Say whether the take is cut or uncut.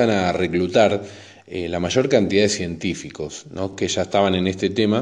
uncut